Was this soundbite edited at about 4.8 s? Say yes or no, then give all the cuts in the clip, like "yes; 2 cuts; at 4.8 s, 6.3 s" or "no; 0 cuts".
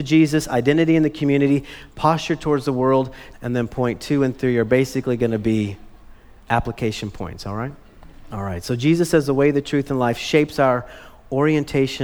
no; 2 cuts; at 3.3 s, 8.3 s